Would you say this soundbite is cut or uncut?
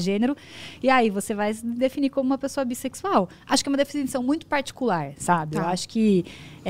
uncut